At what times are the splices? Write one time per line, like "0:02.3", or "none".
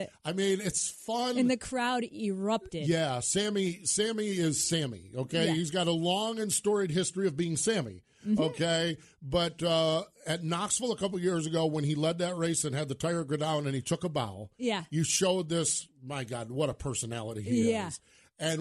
none